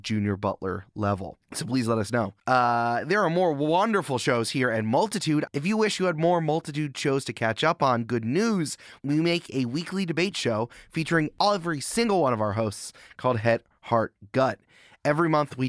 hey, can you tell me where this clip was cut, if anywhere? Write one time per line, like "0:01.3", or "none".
0:02.4
0:05.5